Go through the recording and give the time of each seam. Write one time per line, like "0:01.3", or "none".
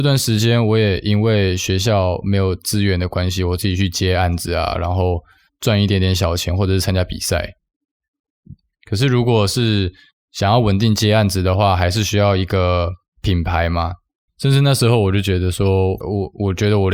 0:14.3
0:16.0